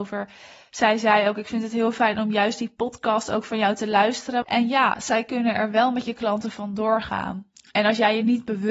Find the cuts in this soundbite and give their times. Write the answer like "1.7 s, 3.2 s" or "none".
4.4 s